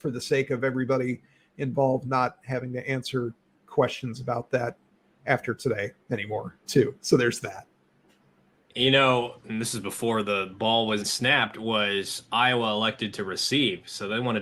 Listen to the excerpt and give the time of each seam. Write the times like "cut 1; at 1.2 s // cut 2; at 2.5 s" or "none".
cut 1; at 9.4 s // cut 2; at 11.0 s

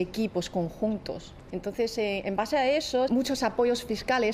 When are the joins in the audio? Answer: cut 1; at 1.5 s // cut 2; at 3.1 s

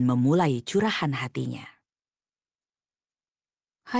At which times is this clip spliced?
none

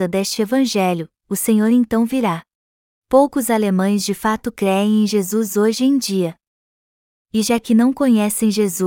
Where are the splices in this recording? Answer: cut 1; at 2.9 s

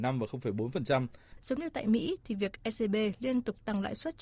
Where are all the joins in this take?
cut 1; at 1.4 s

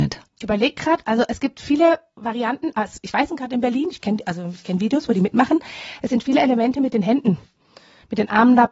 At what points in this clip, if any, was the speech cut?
cut 1; at 3.3 s

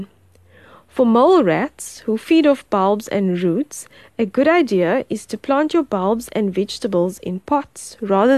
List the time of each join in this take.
none

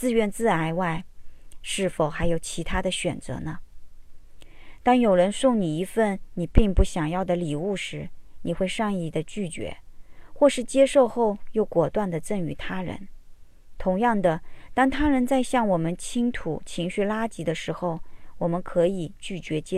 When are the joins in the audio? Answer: none

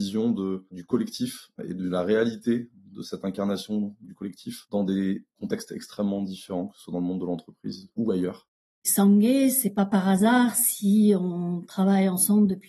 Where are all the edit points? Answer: cut 1; at 8.8 s

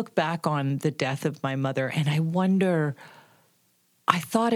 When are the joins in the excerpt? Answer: none

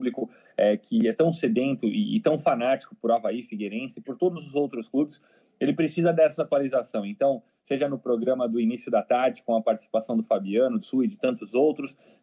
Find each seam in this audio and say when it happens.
cut 1; at 10.8 s

